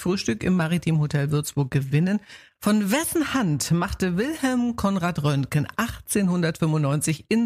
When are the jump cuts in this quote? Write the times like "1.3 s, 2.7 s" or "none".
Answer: 2.6 s